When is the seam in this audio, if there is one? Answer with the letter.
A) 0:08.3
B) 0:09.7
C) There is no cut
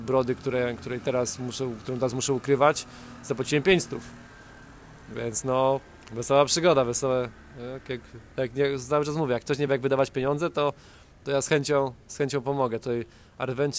C